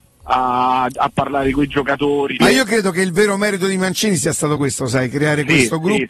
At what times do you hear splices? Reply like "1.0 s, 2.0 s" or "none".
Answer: 2.4 s, 4.6 s